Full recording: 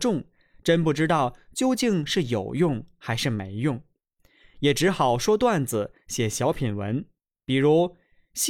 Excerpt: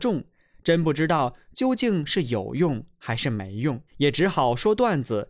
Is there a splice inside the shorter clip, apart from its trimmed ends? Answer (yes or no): yes